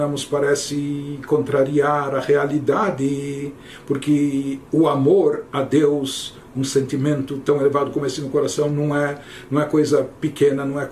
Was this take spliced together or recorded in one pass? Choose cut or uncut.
cut